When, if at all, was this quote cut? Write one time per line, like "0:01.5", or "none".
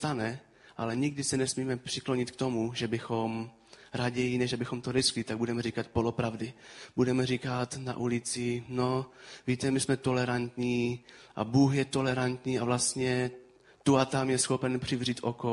none

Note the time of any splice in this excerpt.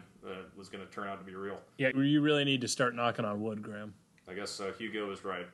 0:01.9

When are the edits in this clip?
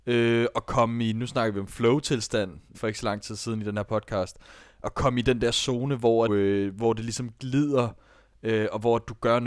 0:02.7
0:06.3

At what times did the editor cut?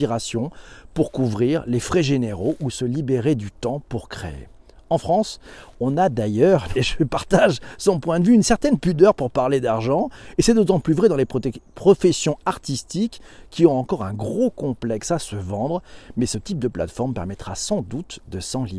0:06.7

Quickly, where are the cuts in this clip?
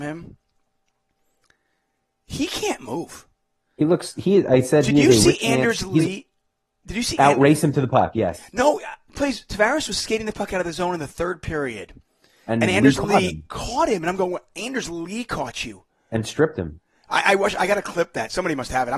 none

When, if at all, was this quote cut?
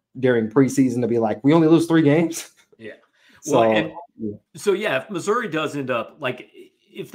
0:04.5

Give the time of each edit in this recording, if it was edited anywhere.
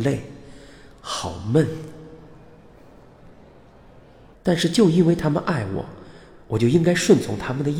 0:04.3

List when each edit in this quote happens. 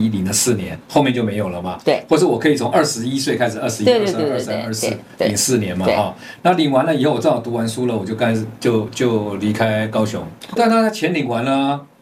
0:08.9
0:10.6

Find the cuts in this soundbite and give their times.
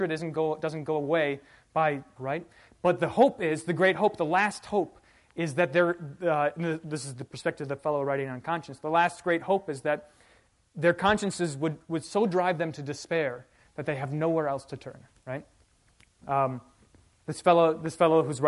0:02.2
0:16.2

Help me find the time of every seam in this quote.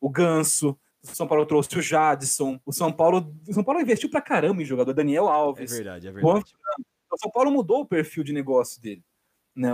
0:02.6

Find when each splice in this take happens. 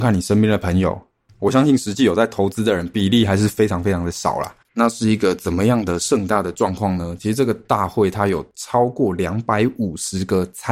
0:04.6

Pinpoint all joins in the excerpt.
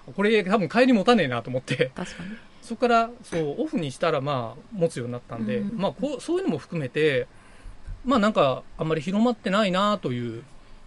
0:05.7

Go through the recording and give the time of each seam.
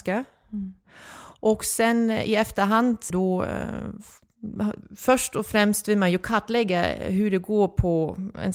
0:03.1
0:04.8

